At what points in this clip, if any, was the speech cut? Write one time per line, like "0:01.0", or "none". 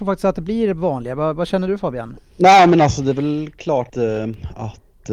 0:02.2
0:03.9